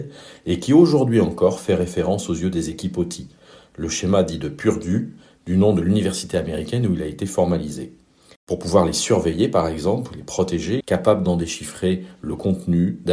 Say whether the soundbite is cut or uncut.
cut